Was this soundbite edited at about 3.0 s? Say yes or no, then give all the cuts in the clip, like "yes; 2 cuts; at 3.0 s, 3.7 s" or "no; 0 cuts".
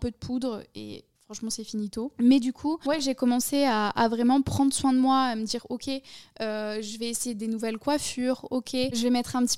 no; 0 cuts